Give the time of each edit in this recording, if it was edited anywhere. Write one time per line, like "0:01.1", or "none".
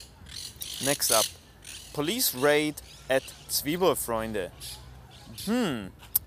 0:05.4